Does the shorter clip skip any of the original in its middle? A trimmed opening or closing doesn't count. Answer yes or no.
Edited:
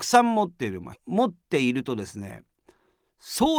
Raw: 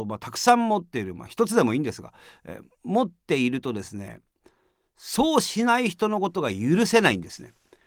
yes